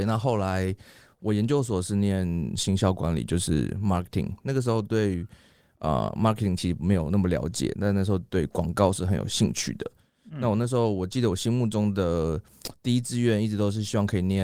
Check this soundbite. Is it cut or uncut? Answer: uncut